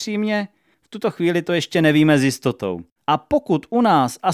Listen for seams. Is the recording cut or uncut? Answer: cut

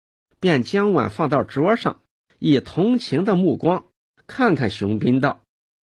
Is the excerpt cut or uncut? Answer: uncut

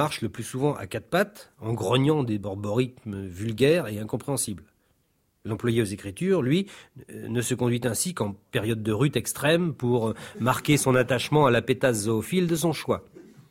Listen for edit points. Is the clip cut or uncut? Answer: uncut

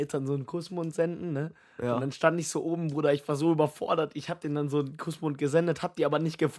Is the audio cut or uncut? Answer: uncut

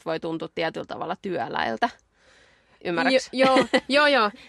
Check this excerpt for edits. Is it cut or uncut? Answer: uncut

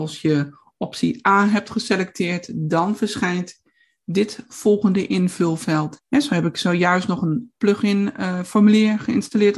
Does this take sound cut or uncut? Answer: cut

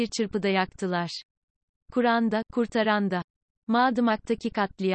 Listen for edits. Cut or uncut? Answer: cut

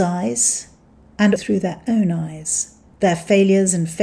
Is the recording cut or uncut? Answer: cut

